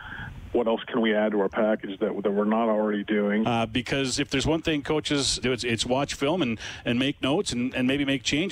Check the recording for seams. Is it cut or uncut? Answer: cut